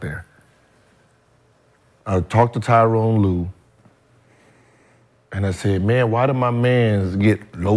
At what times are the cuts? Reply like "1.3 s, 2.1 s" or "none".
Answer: none